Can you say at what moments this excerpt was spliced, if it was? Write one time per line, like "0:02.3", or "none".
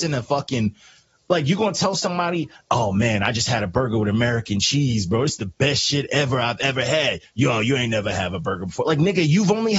none